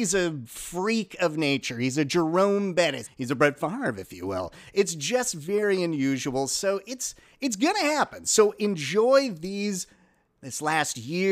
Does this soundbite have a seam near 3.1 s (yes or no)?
yes